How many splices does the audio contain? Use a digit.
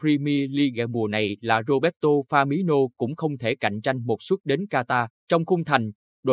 1